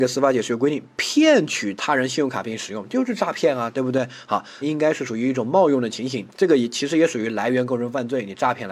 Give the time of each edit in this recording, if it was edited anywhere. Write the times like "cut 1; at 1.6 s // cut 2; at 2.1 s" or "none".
cut 1; at 4.6 s // cut 2; at 6.3 s

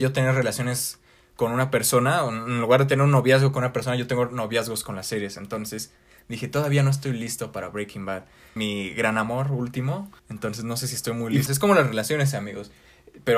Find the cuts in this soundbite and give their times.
cut 1; at 8.6 s // cut 2; at 10.2 s // cut 3; at 11.5 s

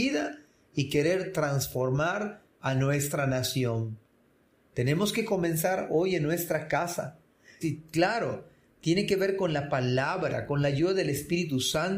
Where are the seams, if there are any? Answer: cut 1; at 7.6 s

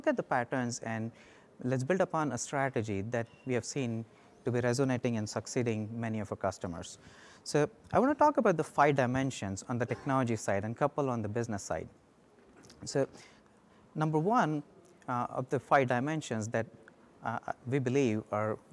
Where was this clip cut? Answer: none

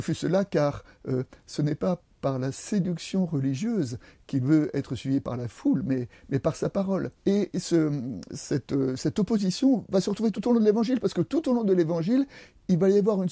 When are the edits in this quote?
cut 1; at 7.2 s

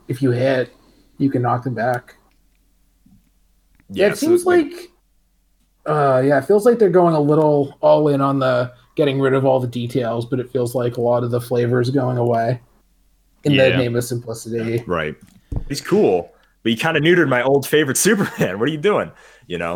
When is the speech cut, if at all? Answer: cut 1; at 15.7 s

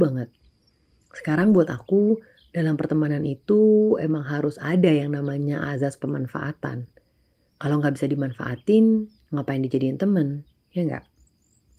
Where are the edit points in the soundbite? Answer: none

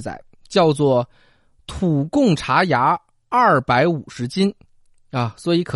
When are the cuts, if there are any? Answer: none

